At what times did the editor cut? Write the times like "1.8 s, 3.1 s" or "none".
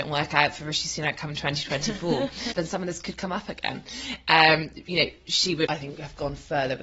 2.5 s, 5.7 s